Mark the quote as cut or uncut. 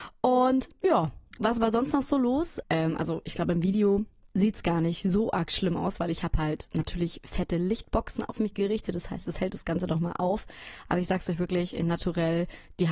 cut